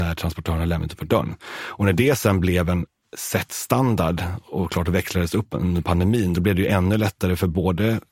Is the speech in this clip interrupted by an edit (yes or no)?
no